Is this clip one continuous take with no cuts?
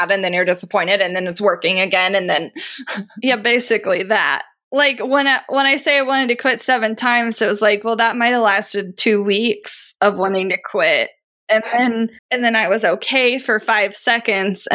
no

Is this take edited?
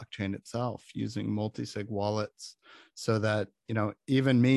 no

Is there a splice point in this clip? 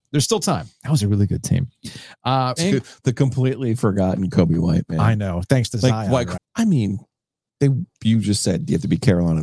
yes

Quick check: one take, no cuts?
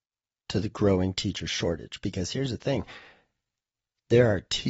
yes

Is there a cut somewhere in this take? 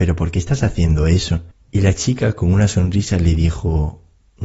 yes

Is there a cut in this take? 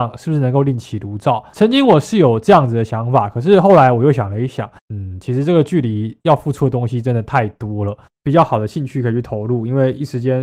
yes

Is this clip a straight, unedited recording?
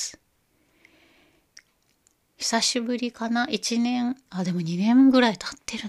no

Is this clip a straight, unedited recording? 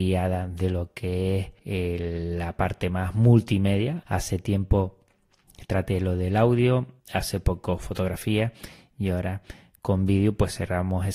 no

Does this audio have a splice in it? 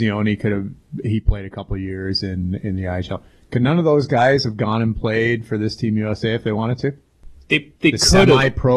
no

